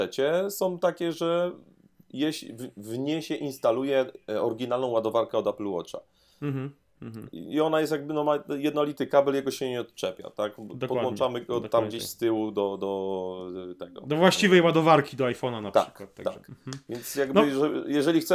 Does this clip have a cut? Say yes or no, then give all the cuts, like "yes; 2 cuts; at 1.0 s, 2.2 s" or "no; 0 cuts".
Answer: no; 0 cuts